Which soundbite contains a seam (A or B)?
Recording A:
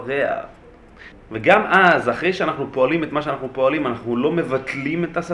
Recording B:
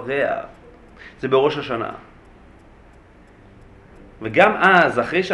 A